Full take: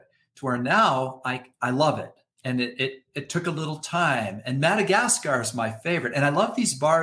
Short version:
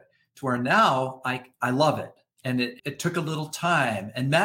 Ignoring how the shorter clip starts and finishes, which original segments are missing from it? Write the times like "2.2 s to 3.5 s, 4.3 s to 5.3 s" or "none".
2.8 s to 3.1 s